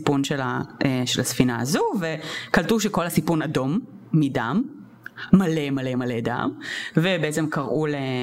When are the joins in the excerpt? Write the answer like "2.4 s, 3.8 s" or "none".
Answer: none

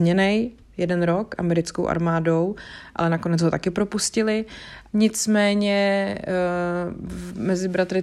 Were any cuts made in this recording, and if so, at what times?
4.9 s

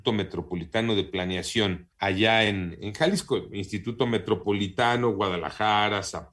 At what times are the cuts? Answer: none

